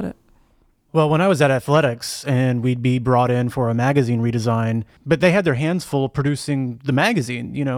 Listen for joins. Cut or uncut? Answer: cut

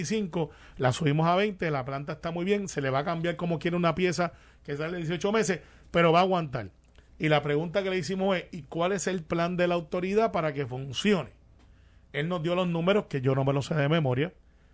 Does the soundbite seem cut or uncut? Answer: cut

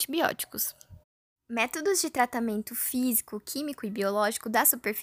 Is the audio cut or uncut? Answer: uncut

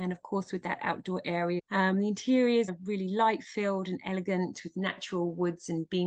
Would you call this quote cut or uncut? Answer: cut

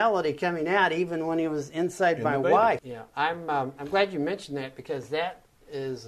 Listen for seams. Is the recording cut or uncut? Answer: cut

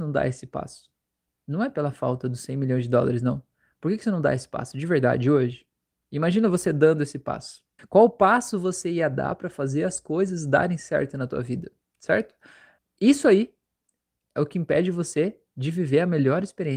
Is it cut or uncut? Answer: cut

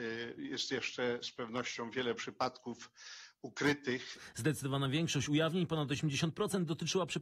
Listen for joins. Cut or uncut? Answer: uncut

